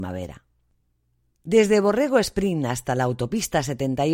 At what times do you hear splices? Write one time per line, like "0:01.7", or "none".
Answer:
none